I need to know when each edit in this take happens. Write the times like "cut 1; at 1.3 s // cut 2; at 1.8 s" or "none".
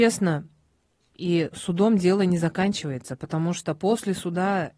cut 1; at 1.1 s